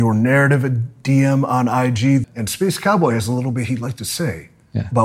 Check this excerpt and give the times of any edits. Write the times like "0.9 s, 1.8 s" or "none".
2.2 s